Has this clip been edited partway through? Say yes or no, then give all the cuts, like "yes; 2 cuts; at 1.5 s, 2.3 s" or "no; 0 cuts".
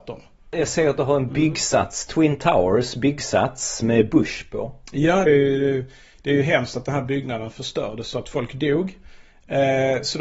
yes; 1 cut; at 5.3 s